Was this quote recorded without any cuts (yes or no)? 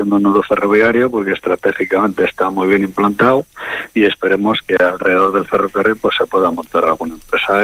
no